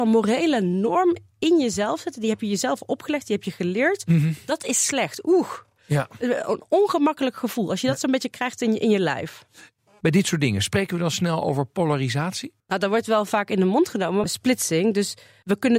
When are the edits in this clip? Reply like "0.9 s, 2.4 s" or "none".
14.2 s